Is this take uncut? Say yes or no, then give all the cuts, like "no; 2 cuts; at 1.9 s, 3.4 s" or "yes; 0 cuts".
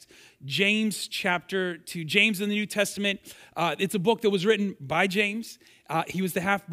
yes; 0 cuts